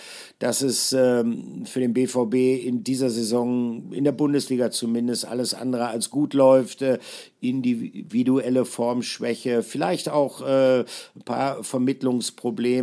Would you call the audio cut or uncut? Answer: uncut